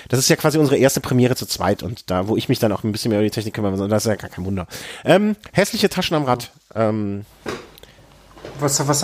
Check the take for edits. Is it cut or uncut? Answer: uncut